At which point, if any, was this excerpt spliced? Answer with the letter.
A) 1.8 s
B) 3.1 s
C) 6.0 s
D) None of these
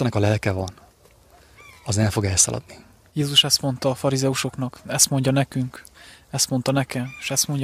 B